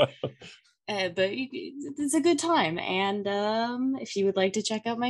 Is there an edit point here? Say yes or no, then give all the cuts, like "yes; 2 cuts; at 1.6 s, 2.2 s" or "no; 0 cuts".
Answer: no; 0 cuts